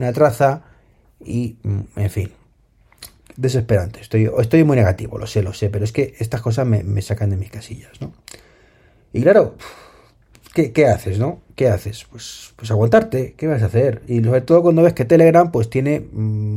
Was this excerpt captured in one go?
yes; 0 cuts

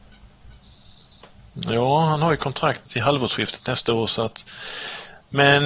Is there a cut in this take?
yes; 1 cut; at 2.9 s

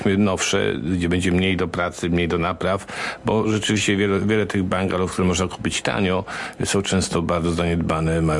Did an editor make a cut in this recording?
no; 0 cuts

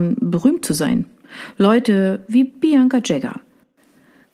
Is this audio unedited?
yes; 0 cuts

